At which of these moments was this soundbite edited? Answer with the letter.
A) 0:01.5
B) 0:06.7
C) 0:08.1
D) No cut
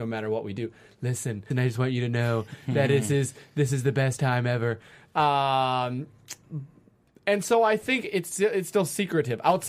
A